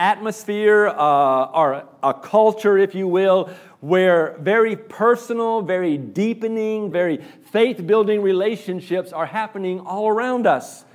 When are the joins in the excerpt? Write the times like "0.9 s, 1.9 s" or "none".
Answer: 6.9 s